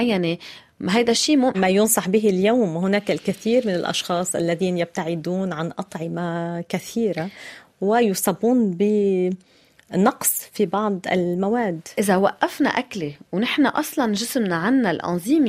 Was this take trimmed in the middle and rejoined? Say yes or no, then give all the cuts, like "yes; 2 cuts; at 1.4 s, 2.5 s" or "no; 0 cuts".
yes; 1 cut; at 1.5 s